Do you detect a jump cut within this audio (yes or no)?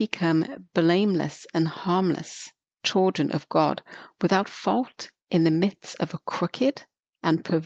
no